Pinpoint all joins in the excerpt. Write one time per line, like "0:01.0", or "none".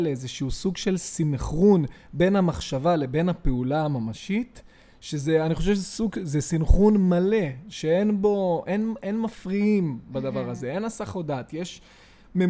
none